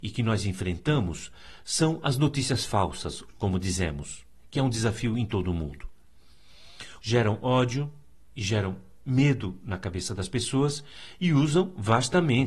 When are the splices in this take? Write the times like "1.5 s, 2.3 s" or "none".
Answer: 3.3 s, 7.0 s